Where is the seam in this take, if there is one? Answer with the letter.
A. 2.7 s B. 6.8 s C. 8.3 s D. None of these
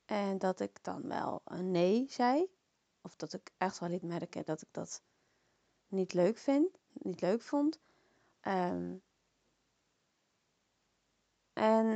C